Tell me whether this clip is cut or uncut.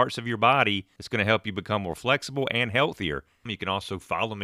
cut